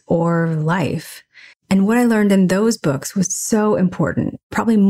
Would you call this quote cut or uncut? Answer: uncut